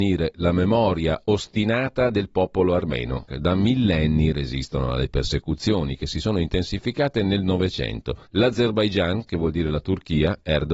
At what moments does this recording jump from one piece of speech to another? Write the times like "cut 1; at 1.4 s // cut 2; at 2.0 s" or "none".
cut 1; at 3.3 s // cut 2; at 8.3 s